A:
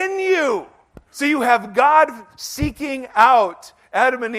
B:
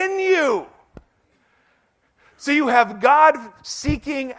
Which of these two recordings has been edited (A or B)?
A